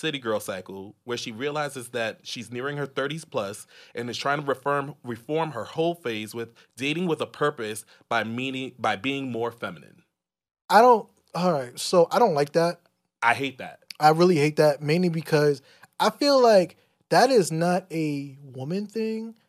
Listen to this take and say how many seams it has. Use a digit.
0